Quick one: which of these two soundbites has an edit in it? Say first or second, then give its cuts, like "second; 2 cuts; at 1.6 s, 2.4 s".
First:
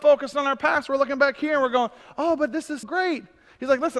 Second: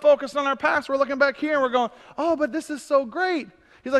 first; 1 cut; at 2.8 s